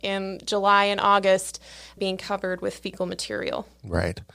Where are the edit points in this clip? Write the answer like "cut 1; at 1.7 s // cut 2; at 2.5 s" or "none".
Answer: cut 1; at 2.0 s